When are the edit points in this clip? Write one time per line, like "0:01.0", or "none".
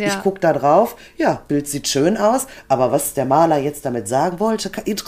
none